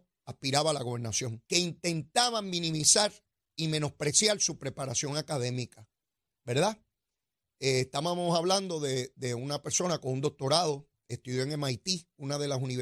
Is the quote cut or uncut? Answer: cut